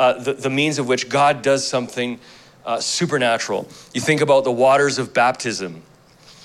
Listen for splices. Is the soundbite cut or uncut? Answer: uncut